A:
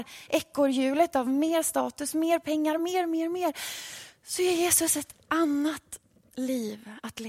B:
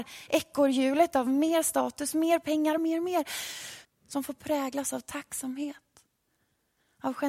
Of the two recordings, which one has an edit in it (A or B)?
B